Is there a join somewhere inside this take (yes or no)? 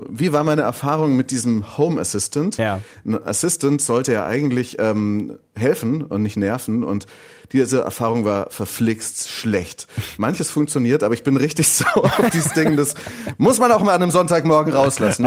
no